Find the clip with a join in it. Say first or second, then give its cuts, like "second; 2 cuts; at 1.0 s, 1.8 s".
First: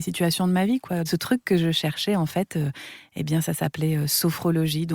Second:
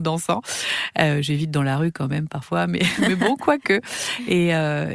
first; 1 cut; at 1.1 s